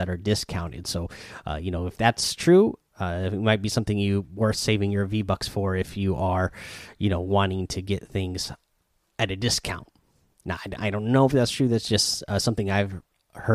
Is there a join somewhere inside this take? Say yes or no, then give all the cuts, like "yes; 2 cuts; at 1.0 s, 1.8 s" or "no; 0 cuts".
yes; 1 cut; at 10.8 s